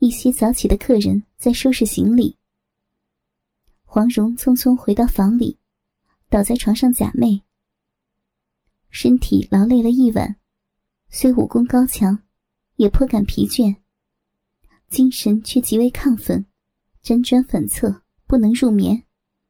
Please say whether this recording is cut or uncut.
uncut